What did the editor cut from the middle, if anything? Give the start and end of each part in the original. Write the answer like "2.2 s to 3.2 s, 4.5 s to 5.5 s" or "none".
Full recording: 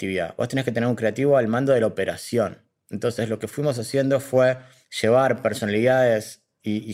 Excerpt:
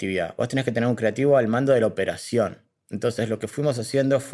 none